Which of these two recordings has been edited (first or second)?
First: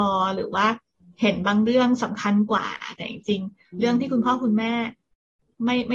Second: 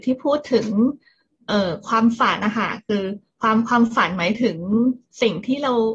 second